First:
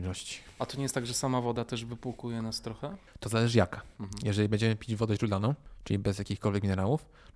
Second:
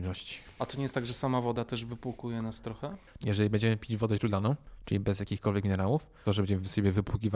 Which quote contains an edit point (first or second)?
second